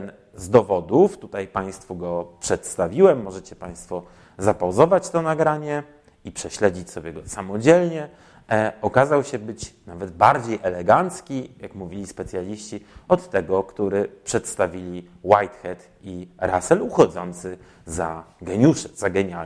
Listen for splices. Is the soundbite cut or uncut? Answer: uncut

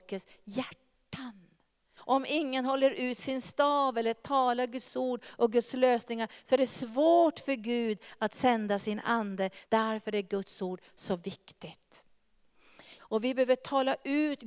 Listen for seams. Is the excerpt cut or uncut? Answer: cut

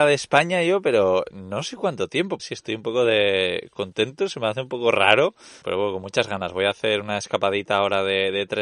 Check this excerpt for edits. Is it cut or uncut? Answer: cut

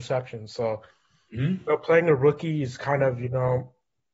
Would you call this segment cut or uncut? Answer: uncut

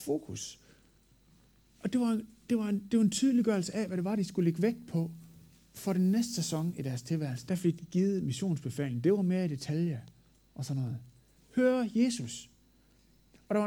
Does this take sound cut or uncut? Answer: cut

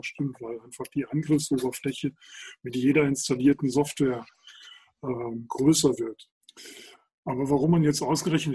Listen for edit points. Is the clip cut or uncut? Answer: uncut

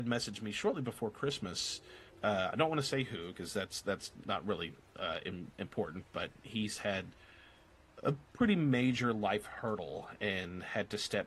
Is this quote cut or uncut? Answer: uncut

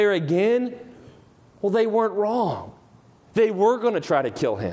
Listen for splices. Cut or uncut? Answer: uncut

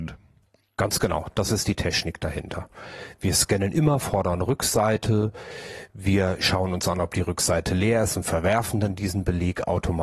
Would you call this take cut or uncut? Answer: uncut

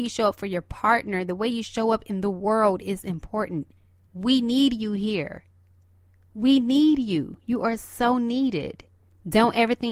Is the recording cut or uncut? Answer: uncut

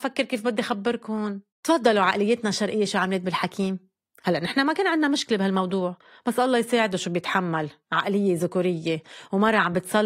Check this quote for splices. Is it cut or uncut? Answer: cut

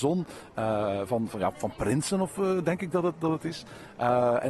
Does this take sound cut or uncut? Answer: uncut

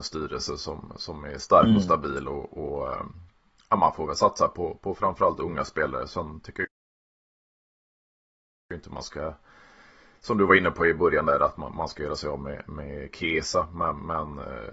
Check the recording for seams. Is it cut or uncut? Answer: uncut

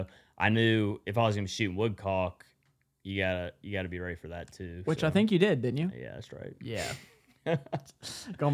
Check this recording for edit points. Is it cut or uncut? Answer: uncut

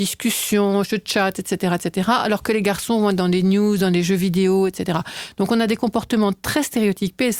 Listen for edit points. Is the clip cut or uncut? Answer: uncut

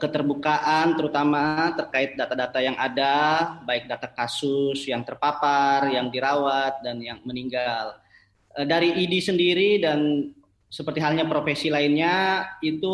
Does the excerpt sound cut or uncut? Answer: uncut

